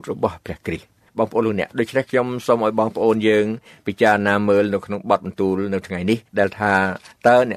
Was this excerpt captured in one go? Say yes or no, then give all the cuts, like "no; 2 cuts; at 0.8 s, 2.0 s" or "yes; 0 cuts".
no; 1 cut; at 6.3 s